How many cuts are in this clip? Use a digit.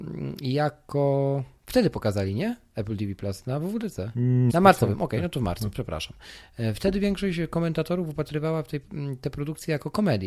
1